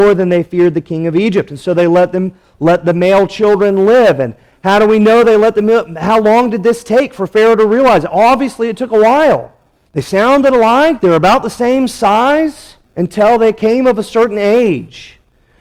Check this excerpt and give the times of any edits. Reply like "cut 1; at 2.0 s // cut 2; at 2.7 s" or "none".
cut 1; at 9.9 s // cut 2; at 12.8 s